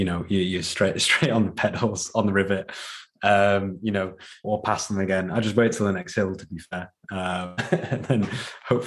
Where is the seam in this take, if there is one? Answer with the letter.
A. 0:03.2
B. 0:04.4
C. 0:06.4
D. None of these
B